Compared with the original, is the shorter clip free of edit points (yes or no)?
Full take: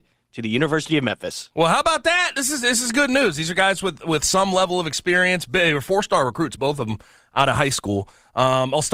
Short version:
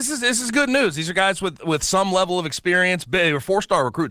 yes